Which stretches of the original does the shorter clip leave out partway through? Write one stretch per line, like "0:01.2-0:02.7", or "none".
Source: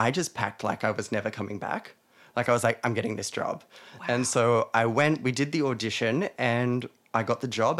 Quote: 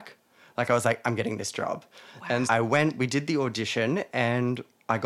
0:04.2-0:04.7